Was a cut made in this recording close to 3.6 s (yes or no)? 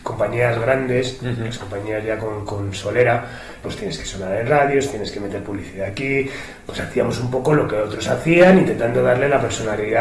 yes